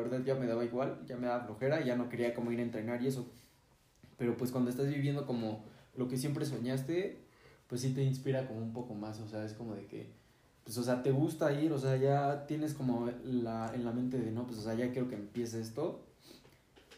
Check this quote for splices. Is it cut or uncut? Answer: uncut